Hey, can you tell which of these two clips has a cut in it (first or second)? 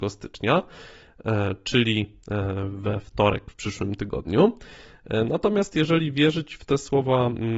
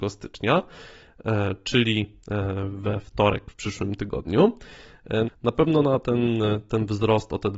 second